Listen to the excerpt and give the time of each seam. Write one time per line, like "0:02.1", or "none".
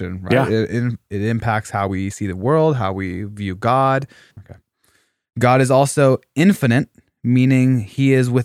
0:04.3